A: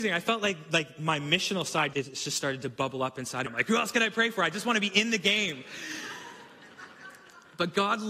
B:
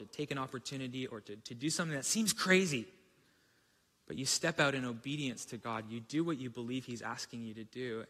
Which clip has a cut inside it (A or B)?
A